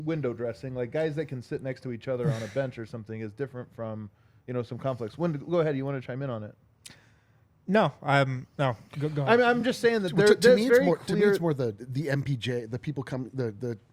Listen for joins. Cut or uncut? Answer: uncut